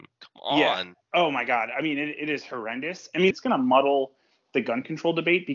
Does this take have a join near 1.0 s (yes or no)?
no